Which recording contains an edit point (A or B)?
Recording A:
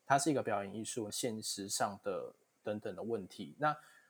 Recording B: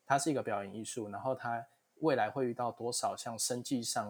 A